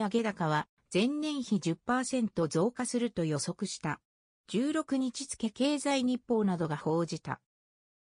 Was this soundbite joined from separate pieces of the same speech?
no; 0 cuts

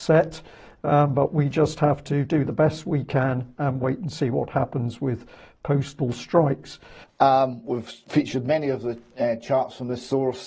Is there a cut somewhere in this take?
yes; 1 cut; at 7.0 s

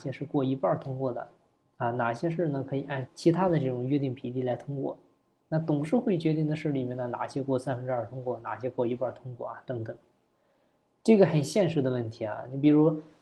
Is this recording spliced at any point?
yes; 1 cut; at 3.1 s

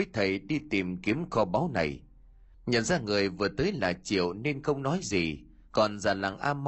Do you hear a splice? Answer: yes; 1 cut; at 2.5 s

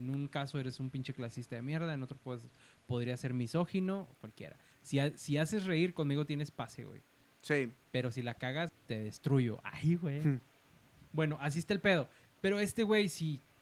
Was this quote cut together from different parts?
yes; 1 cut; at 8.7 s

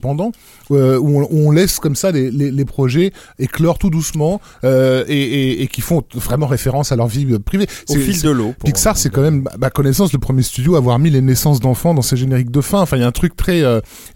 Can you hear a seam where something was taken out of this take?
no; 0 cuts

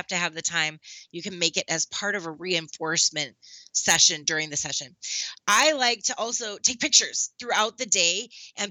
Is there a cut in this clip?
no; 0 cuts

